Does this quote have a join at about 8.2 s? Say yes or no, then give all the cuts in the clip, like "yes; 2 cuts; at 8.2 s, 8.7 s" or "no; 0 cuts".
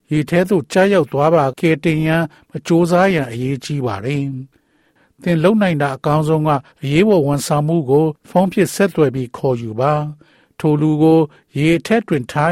yes; 3 cuts; at 1.5 s, 6.7 s, 8.2 s